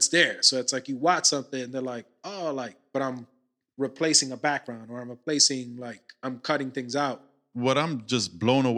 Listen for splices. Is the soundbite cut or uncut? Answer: uncut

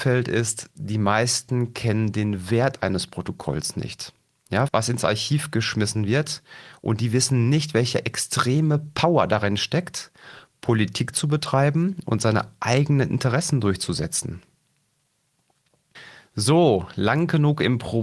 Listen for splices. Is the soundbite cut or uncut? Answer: cut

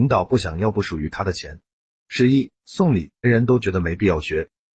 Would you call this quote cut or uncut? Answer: cut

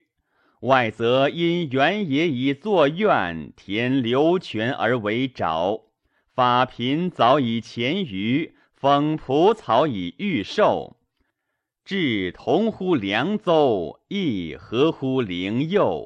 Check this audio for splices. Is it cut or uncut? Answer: uncut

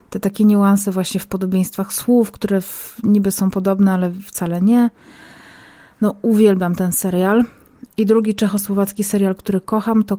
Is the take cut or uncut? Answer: uncut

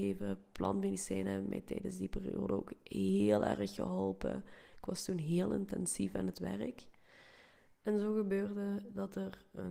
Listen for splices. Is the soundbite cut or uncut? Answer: uncut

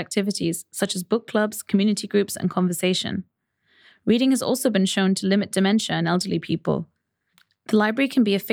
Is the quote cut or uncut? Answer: uncut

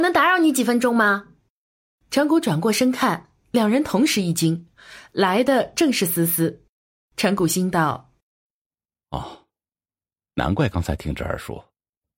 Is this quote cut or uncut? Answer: uncut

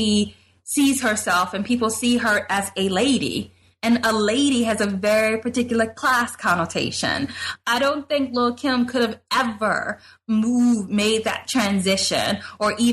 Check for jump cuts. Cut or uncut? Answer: cut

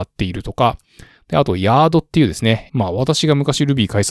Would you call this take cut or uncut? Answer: cut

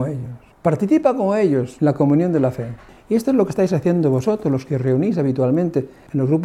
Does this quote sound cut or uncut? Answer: uncut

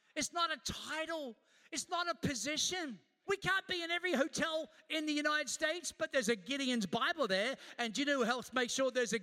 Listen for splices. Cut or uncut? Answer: cut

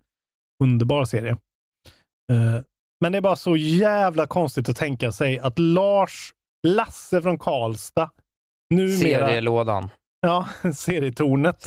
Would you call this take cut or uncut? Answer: uncut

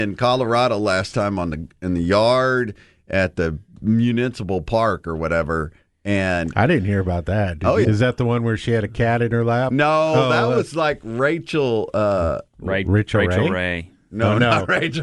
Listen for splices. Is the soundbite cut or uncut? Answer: cut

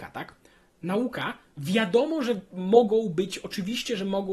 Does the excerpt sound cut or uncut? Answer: uncut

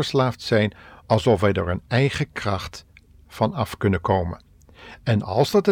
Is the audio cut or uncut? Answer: cut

